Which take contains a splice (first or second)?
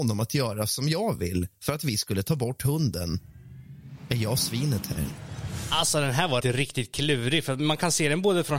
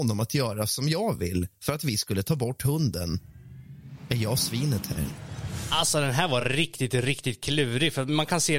first